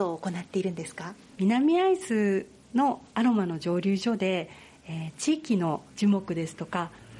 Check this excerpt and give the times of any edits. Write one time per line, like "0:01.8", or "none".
0:05.9